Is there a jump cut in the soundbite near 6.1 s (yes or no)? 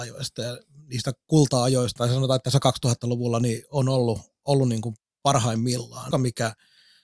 yes